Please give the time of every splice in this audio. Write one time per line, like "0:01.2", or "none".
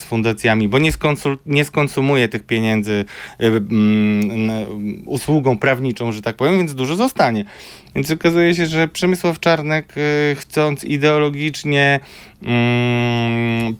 0:07.9